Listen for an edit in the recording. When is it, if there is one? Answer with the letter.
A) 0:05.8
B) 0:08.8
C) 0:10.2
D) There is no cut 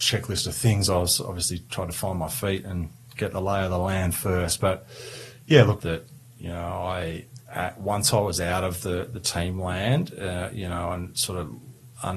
A